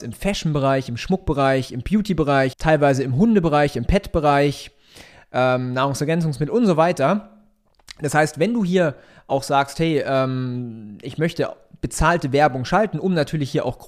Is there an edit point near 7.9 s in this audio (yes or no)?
no